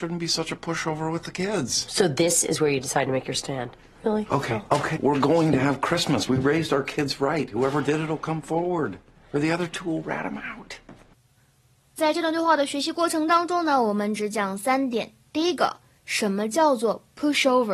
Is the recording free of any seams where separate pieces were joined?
no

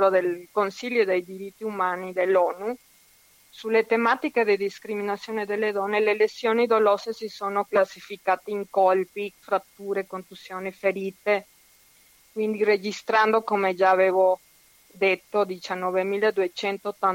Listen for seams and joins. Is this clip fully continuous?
no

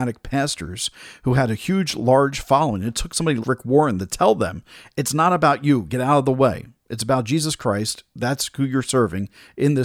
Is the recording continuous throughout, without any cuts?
no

